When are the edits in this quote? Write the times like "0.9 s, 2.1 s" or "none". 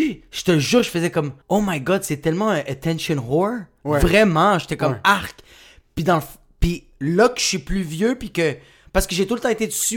1.4 s